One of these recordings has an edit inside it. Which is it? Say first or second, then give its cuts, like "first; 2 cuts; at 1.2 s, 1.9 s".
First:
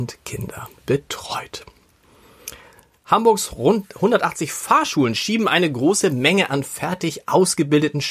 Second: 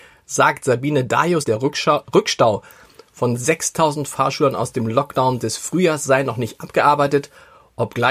second; 1 cut; at 1.4 s